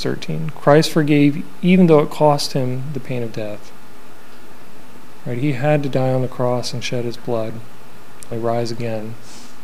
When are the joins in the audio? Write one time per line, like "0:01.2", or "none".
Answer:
0:08.3